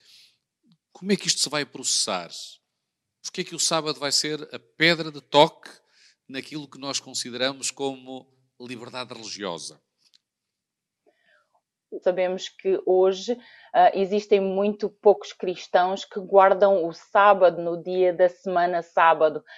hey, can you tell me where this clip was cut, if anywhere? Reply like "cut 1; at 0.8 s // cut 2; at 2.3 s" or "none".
cut 1; at 12.0 s